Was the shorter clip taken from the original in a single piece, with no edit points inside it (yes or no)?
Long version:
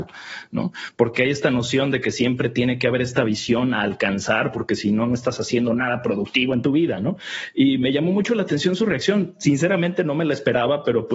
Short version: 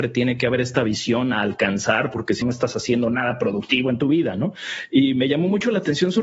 no